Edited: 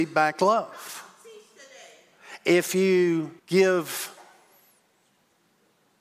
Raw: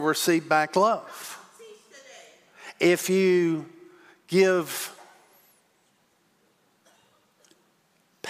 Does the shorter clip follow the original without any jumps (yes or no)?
no